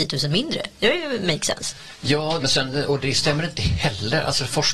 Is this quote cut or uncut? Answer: cut